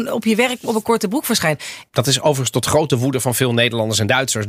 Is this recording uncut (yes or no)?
no